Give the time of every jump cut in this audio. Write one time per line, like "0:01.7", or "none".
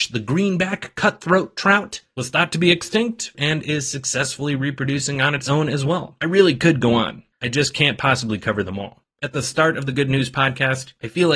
0:03.3
0:07.3
0:09.0